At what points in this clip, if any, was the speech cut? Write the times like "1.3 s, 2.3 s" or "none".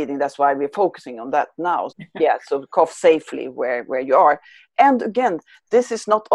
1.9 s